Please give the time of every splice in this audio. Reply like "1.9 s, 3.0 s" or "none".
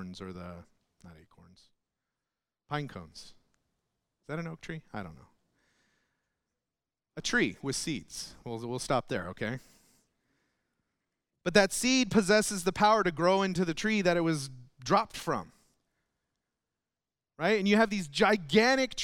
none